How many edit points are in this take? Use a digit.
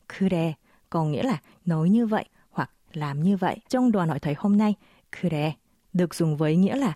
1